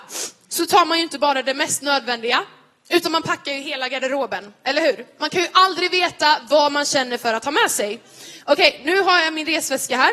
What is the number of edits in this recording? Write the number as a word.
one